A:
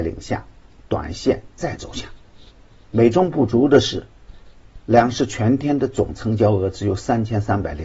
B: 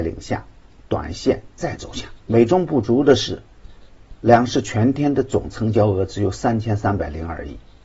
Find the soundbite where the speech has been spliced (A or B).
B